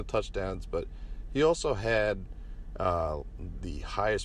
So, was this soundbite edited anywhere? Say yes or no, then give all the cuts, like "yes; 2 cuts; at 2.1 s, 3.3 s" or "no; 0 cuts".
no; 0 cuts